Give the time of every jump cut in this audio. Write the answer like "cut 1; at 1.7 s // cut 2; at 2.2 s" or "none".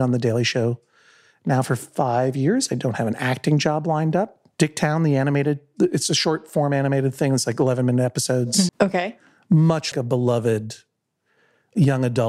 cut 1; at 4.5 s // cut 2; at 8.7 s // cut 3; at 9.9 s